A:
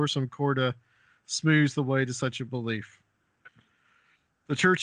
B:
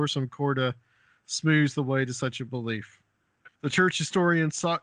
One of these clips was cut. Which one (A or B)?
B